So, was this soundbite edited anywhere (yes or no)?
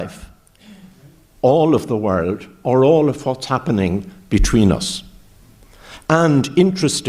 no